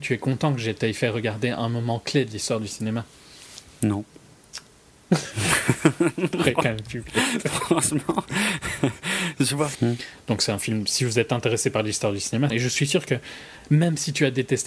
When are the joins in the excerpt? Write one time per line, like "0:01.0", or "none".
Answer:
0:09.7
0:12.5